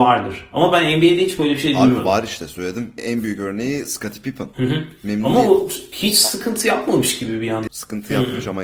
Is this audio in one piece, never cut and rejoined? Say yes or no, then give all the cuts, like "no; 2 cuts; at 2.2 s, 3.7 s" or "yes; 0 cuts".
no; 2 cuts; at 3.0 s, 7.7 s